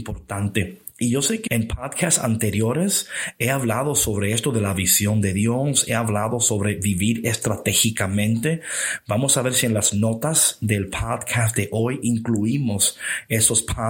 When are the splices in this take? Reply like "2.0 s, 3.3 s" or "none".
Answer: 1.5 s